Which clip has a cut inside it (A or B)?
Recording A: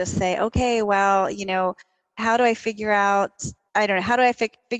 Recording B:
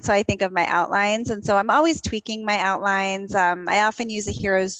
A